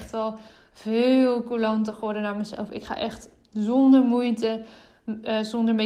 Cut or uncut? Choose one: uncut